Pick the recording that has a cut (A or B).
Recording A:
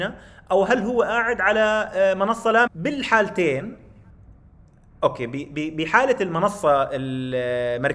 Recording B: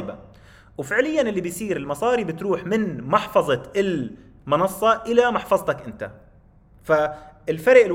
A